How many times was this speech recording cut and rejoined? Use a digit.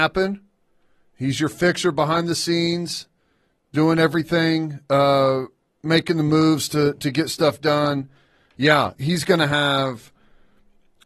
0